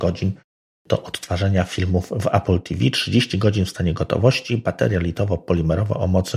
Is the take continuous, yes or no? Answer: yes